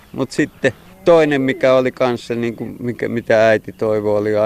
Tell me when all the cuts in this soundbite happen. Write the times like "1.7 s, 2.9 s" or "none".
none